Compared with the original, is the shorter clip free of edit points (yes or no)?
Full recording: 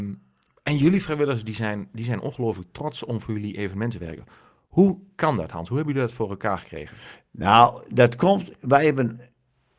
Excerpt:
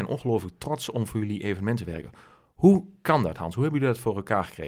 yes